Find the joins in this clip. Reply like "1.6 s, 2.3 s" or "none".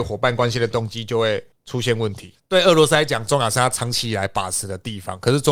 2.3 s